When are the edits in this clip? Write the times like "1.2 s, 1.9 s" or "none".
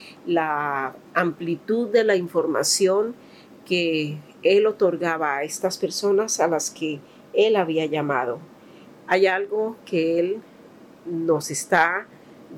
8.9 s